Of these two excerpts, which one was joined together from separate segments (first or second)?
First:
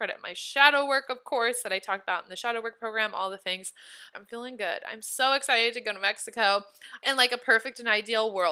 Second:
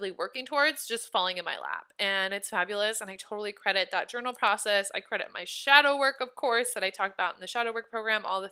first